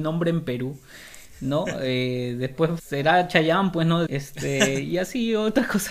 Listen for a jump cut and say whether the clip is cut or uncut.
cut